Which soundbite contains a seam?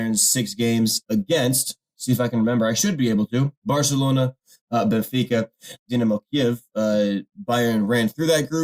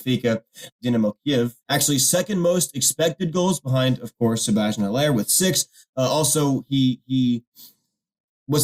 second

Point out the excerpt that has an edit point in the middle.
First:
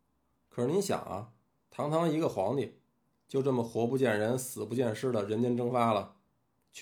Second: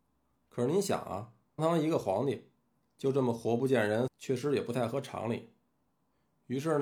second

